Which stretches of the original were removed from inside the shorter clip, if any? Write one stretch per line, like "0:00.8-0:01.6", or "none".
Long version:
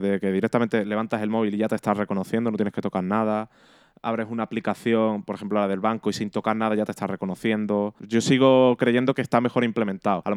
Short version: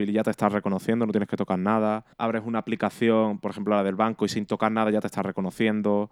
0:03.6-0:04.0